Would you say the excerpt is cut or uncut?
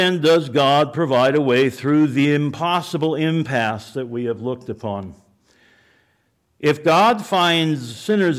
uncut